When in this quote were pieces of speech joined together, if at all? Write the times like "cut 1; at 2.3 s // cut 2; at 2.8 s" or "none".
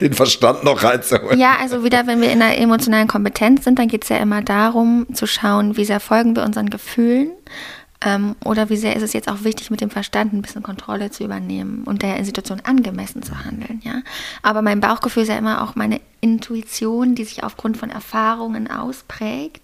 none